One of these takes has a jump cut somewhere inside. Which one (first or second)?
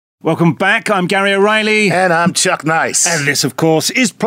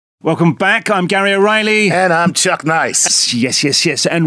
second